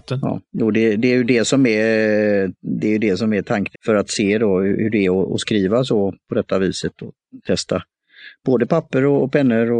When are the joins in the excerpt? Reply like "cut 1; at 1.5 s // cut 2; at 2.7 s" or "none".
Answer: cut 1; at 3.7 s